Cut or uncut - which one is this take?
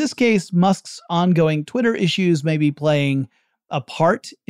uncut